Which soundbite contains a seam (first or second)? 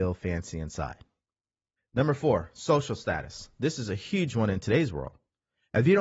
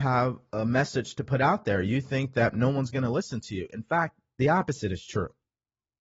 first